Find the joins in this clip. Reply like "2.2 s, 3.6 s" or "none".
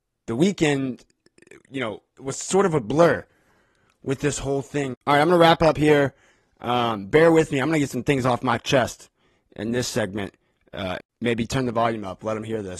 4.9 s, 11.0 s